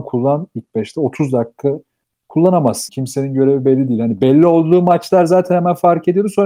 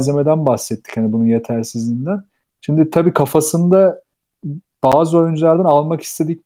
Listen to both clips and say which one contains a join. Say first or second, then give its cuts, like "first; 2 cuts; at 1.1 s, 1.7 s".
first; 1 cut; at 2.9 s